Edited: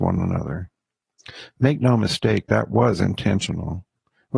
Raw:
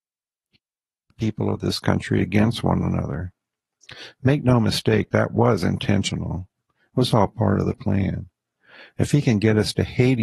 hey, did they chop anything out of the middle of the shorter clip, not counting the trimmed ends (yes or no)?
no